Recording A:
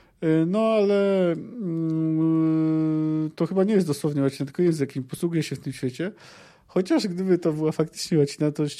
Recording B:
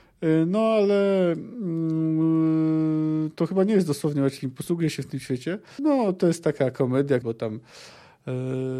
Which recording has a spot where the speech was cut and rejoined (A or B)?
B